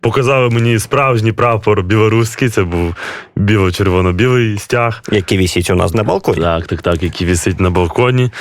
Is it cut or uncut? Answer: cut